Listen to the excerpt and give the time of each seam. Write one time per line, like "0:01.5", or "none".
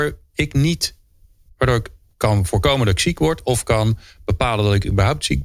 none